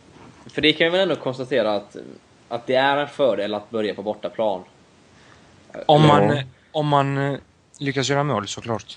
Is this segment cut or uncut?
uncut